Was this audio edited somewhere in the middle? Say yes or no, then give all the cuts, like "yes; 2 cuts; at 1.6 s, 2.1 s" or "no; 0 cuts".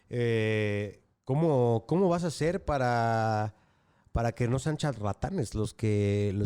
no; 0 cuts